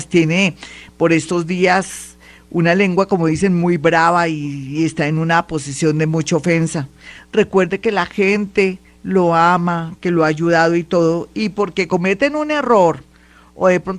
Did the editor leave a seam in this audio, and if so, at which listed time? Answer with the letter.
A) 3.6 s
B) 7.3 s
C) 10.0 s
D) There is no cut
D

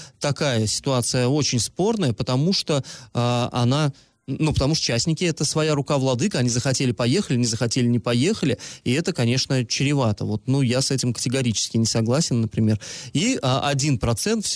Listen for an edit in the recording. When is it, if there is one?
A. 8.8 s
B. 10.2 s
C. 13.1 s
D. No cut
D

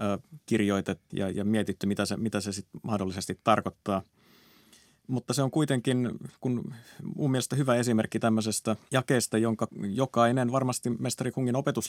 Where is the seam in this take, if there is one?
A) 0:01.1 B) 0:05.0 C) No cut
A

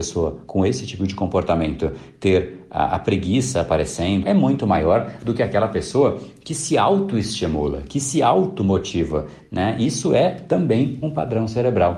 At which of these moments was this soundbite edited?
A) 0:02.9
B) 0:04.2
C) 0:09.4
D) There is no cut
B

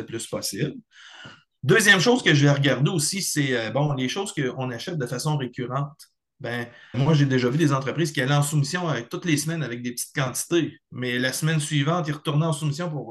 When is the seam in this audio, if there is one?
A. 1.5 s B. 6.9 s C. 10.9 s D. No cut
B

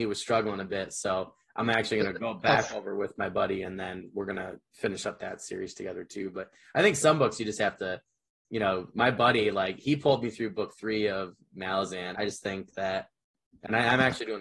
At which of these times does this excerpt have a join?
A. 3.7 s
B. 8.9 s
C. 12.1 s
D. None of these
C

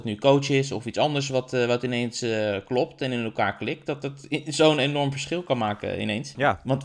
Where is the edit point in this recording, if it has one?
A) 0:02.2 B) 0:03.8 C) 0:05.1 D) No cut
D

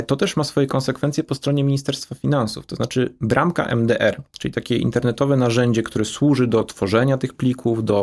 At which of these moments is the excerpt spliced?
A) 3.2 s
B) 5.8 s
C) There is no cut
C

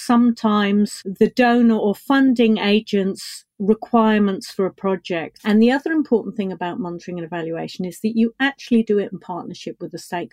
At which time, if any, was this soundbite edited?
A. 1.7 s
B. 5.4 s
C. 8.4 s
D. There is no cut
B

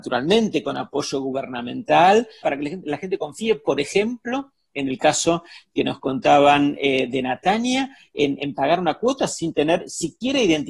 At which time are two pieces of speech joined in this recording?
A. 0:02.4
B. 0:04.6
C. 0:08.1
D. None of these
A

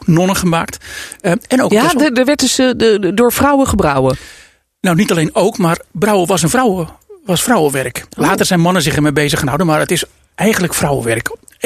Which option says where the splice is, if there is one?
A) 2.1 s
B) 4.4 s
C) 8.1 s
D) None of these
D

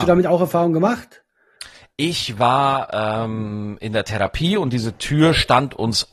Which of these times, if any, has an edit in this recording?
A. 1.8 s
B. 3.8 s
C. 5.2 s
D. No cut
D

